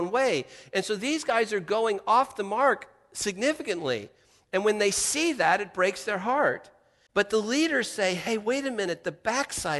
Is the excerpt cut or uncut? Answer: uncut